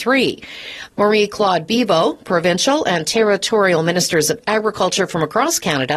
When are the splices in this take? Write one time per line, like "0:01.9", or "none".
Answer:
0:00.9

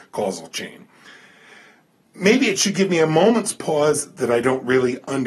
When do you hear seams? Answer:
none

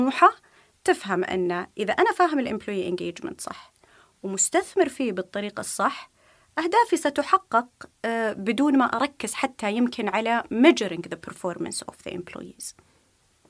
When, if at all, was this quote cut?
none

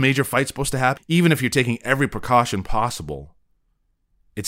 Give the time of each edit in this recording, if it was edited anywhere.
0:01.0

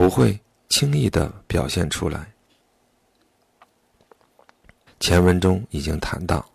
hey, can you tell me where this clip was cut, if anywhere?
0:04.9

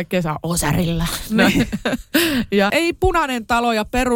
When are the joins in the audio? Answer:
none

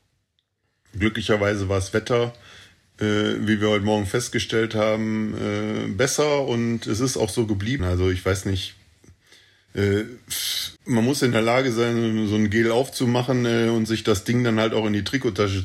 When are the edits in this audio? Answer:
0:07.8
0:10.8

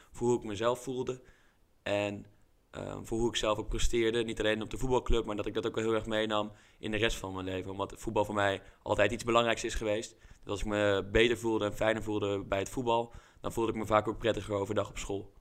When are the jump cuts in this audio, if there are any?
none

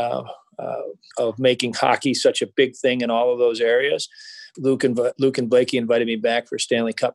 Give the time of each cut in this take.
0:01.1
0:04.5

